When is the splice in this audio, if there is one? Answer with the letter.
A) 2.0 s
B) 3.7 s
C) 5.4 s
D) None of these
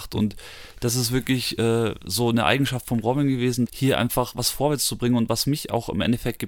B